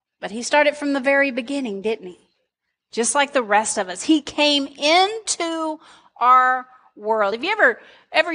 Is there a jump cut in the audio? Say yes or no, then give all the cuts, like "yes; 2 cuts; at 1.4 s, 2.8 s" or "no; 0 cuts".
no; 0 cuts